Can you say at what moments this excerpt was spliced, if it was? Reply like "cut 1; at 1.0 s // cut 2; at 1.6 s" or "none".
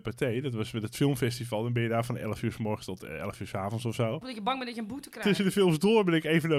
cut 1; at 4.2 s